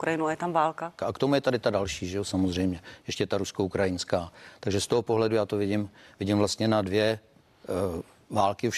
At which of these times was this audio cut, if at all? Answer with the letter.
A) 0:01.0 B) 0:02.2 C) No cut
A